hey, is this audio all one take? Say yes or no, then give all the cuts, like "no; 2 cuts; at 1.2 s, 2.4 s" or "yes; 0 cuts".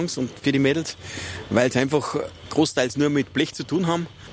yes; 0 cuts